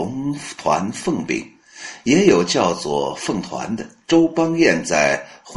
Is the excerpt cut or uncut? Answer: uncut